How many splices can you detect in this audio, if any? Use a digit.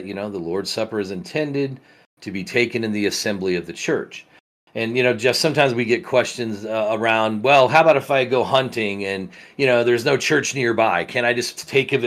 0